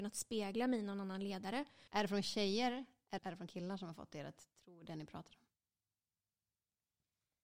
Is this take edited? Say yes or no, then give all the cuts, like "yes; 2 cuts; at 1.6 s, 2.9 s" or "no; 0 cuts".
yes; 2 cuts; at 1.9 s, 3.2 s